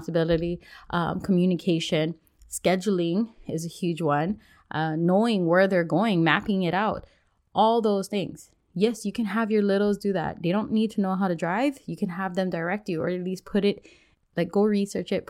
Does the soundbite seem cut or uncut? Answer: uncut